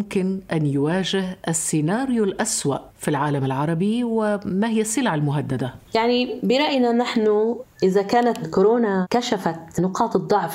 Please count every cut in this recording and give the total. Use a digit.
1